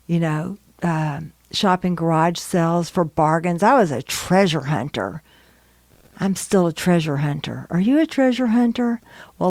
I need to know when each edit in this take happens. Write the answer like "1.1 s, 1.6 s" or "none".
none